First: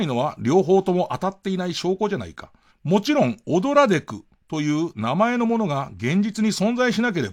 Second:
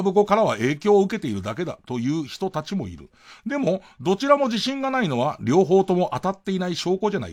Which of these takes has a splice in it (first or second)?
first